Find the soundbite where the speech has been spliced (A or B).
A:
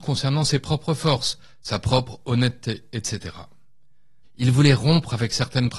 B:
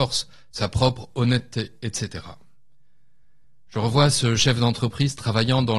A